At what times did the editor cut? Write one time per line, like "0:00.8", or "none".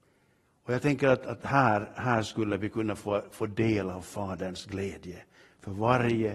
none